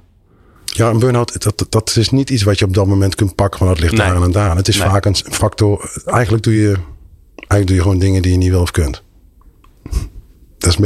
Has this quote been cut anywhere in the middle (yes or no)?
no